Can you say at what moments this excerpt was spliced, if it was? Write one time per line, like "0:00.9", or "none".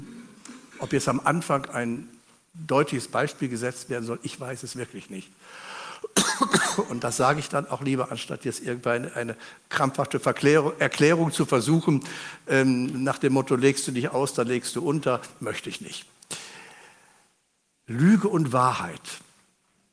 none